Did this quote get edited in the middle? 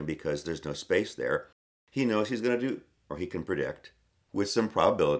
no; 0 cuts

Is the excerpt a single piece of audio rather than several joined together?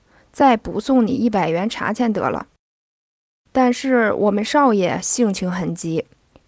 yes; 0 cuts

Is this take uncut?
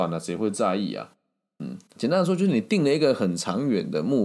no; 1 cut; at 2.0 s

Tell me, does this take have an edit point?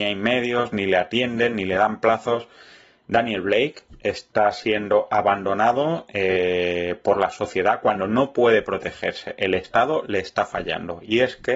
no; 0 cuts

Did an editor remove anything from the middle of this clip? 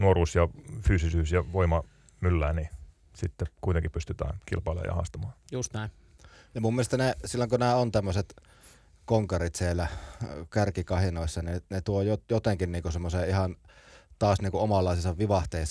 no; 0 cuts

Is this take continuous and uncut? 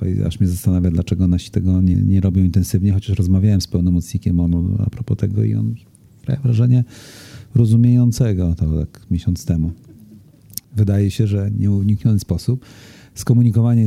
no; 2 cuts; at 1.9 s, 10.6 s

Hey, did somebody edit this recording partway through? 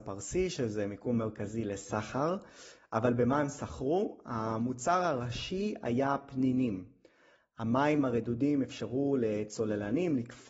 no; 0 cuts

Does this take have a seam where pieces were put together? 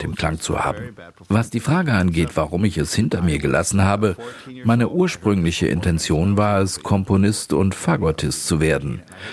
no; 0 cuts

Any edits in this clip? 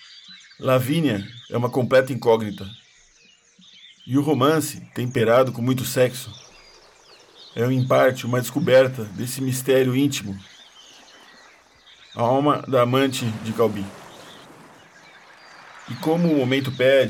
yes; 1 cut; at 1.4 s

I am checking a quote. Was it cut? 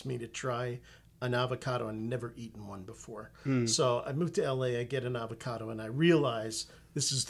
no; 0 cuts

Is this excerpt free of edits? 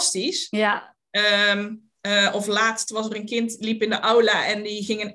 yes; 0 cuts

